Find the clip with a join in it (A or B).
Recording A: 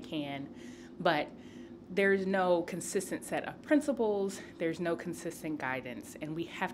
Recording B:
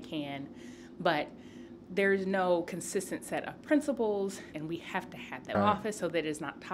B